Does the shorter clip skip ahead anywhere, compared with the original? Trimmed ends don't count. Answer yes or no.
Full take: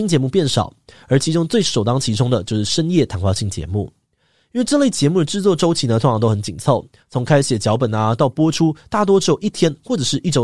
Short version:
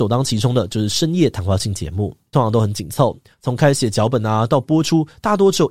yes